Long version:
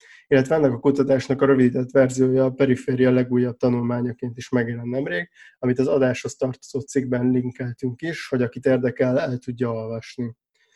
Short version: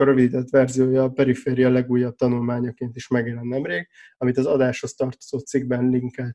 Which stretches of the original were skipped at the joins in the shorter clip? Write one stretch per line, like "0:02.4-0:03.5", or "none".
none